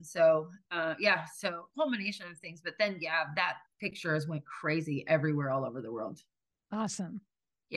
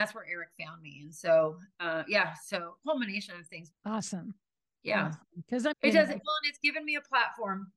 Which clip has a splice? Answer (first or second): second